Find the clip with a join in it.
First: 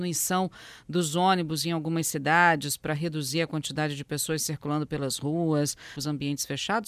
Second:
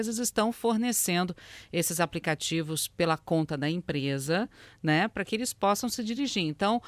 first; 1 cut; at 6.0 s

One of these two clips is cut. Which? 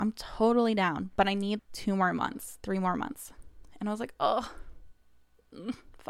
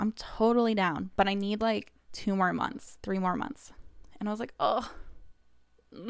first; 1 cut; at 1.6 s

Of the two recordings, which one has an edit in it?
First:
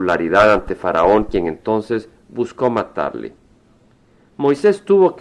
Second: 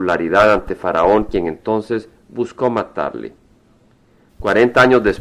second; 1 cut; at 4.3 s

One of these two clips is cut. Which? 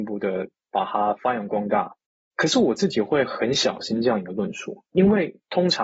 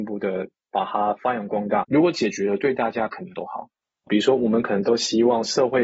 second; 2 cuts; at 1.8 s, 4.1 s

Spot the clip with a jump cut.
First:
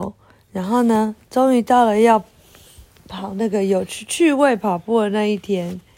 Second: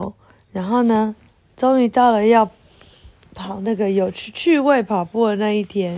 first; 1 cut; at 1.2 s

